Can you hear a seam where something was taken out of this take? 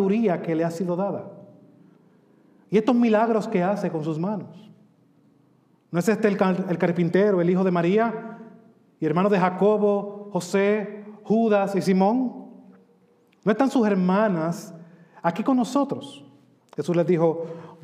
yes; 1 cut; at 16.6 s

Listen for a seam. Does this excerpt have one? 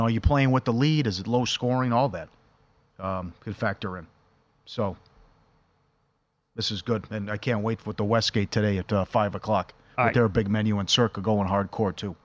no; 0 cuts

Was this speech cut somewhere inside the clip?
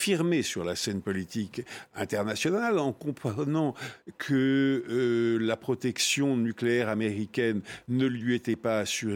no; 0 cuts

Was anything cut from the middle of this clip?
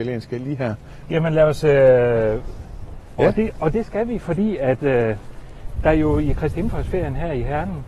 yes; 2 cuts; at 1.0 s, 3.2 s

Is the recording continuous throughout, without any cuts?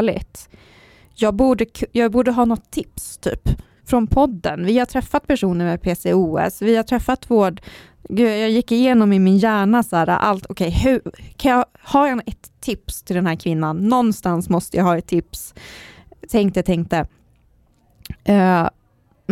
yes; 0 cuts

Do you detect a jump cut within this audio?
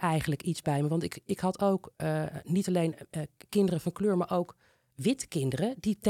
no; 0 cuts

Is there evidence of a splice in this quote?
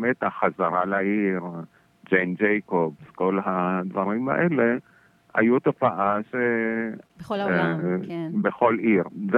no; 0 cuts

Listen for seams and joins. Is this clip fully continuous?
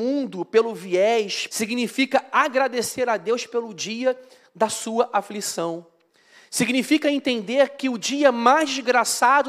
no; 1 cut; at 1.5 s

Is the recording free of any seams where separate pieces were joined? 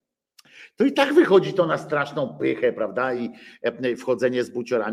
yes; 0 cuts

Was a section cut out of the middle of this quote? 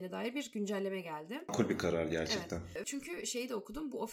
yes; 2 cuts; at 1.5 s, 2.8 s

